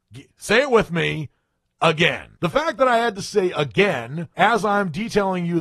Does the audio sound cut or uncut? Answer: cut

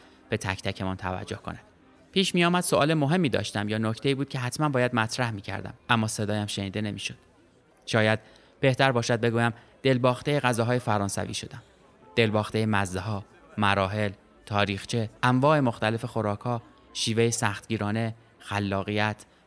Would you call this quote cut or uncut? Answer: cut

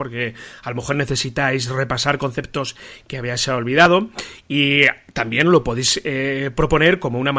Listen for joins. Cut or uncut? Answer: uncut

